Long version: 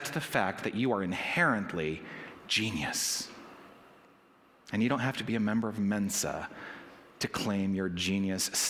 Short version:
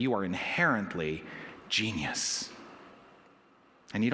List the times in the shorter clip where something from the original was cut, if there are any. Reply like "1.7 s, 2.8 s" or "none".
none